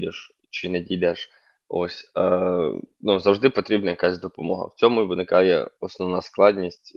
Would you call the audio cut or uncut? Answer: uncut